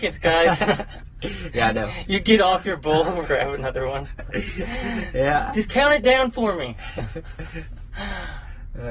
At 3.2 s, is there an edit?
yes; 1 cut; at 3.2 s

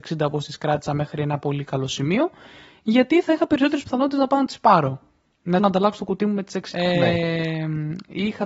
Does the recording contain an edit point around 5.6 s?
yes; 2 cuts; at 5.6 s, 6.7 s

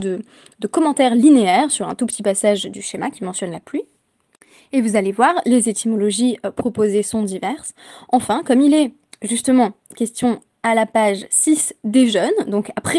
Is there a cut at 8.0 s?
no; 0 cuts

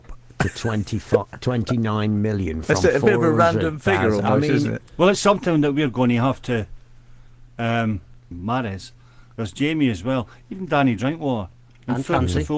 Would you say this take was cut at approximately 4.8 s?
yes; 2 cuts; at 4.8 s, 8.3 s

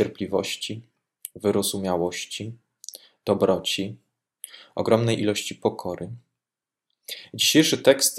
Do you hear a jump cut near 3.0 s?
no; 0 cuts

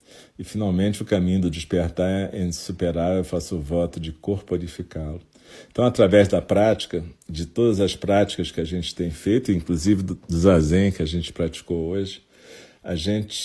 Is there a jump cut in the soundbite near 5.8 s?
no; 0 cuts

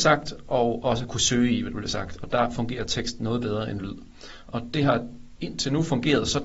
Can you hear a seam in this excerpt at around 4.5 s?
yes; 1 cut; at 4.5 s

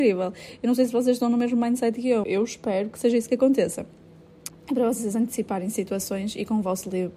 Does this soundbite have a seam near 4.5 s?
yes; 2 cuts; at 2.2 s, 4.5 s

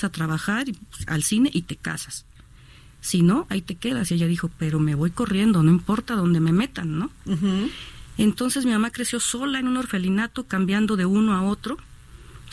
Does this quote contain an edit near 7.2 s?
no; 1 cut; at 4.1 s

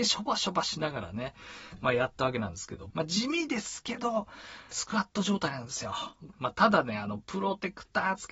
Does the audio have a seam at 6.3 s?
yes; 3 cuts; at 2.9 s, 4.7 s, 6.3 s

